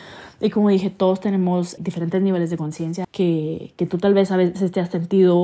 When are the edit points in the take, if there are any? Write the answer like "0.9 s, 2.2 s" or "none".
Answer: 1.8 s, 3.0 s